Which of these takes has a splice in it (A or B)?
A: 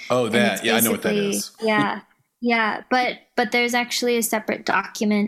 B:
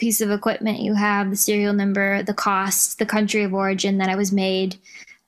A